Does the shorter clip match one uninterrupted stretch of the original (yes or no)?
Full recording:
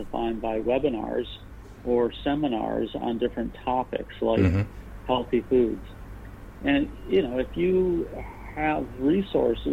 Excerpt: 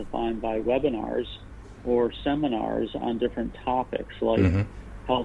yes